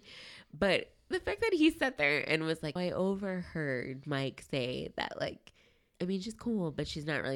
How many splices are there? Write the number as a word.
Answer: two